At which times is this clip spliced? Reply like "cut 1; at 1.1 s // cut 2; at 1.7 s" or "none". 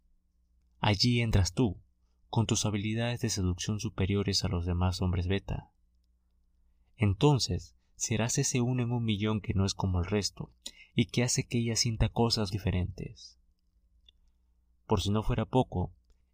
cut 1; at 12.5 s

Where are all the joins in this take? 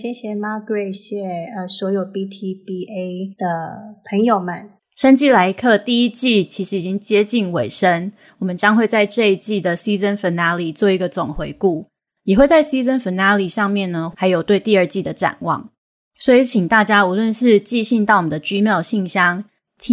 cut 1; at 0.9 s // cut 2; at 4.8 s // cut 3; at 14.1 s

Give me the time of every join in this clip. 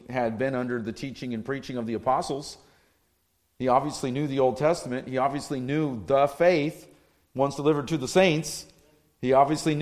none

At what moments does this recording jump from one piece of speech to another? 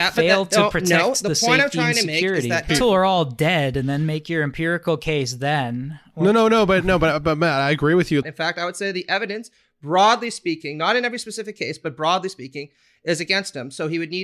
cut 1; at 2.7 s // cut 2; at 8.2 s

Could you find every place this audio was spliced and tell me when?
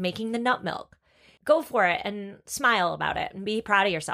cut 1; at 1.4 s

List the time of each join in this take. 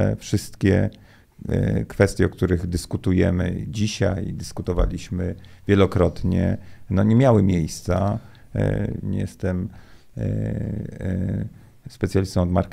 cut 1; at 9.0 s

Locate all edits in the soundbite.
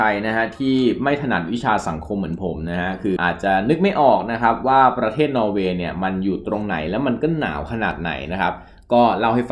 cut 1; at 3.2 s

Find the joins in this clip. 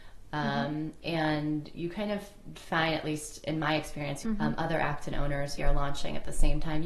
cut 1; at 4.2 s // cut 2; at 5.6 s

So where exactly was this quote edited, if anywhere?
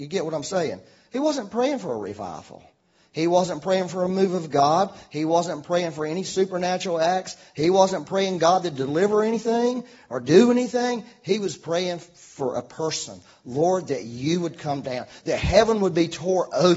none

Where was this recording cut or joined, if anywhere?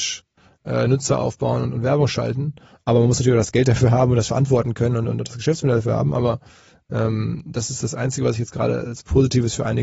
none

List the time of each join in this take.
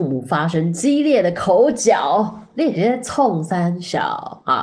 none

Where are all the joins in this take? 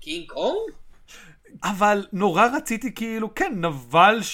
cut 1; at 1.6 s

